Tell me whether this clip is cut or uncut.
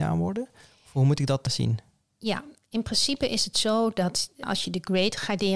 uncut